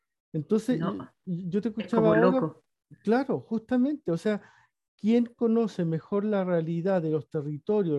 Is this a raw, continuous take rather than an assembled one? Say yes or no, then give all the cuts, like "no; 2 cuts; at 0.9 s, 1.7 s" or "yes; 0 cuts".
yes; 0 cuts